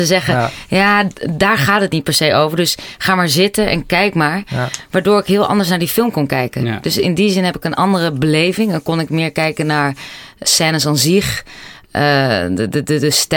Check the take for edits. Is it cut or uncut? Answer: uncut